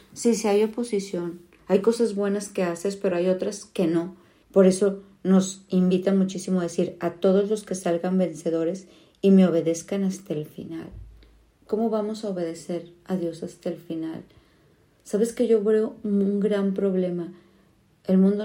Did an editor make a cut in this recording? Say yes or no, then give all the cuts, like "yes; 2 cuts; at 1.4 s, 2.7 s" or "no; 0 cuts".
yes; 1 cut; at 4.4 s